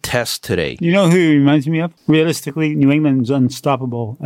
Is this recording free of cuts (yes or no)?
no